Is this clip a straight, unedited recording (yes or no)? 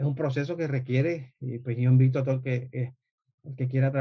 yes